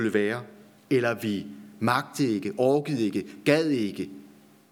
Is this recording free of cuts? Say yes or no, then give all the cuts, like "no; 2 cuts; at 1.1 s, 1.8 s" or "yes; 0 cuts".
yes; 0 cuts